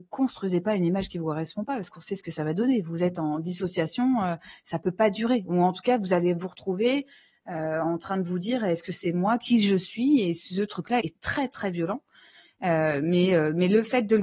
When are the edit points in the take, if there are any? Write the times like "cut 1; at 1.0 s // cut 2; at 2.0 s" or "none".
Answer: cut 1; at 11.0 s

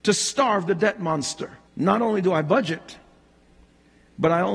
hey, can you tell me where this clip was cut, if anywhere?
cut 1; at 1.7 s

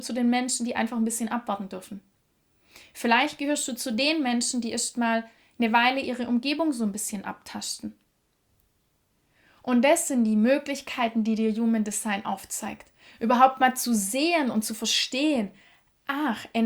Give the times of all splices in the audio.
none

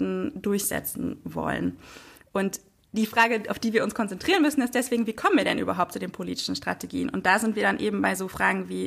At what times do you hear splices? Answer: none

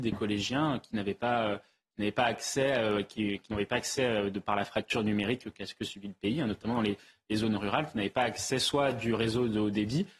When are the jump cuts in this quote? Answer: none

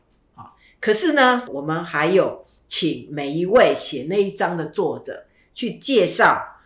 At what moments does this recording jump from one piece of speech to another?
cut 1; at 1.5 s

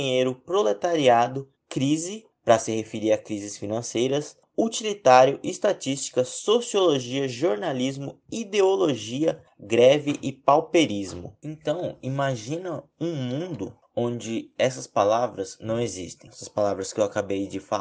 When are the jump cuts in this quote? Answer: none

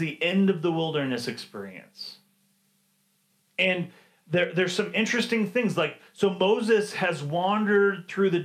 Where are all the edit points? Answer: none

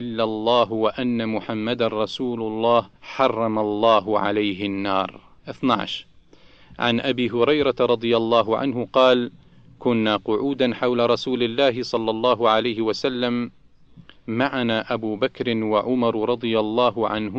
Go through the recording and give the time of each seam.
cut 1; at 3.0 s // cut 2; at 5.4 s

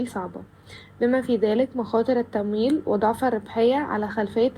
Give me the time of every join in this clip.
none

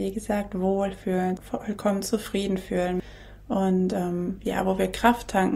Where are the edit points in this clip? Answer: cut 1; at 1.4 s

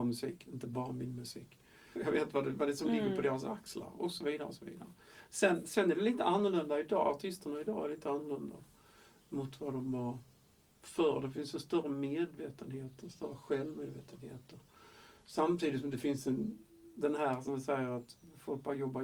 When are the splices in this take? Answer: cut 1; at 1.9 s

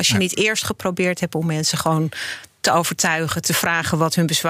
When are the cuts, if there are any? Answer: none

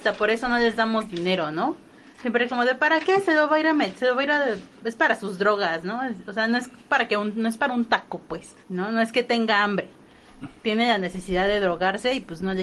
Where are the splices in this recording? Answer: cut 1; at 8.6 s

